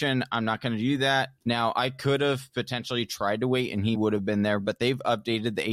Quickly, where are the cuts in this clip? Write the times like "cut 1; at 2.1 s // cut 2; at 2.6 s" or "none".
cut 1; at 1.4 s // cut 2; at 3.9 s